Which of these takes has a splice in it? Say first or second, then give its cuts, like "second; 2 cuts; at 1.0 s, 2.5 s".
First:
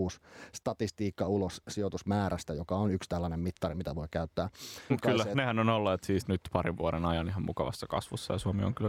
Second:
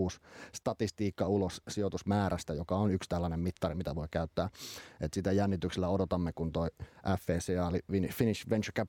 first; 2 cuts; at 4.9 s, 6.2 s